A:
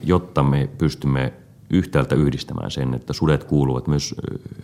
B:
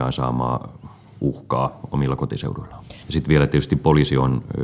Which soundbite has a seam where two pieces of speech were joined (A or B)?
B